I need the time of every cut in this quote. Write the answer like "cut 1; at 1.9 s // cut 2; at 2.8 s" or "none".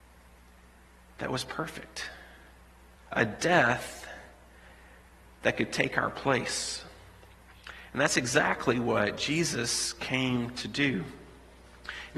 cut 1; at 3.0 s